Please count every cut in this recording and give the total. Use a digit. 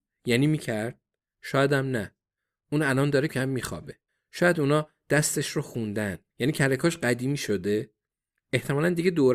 2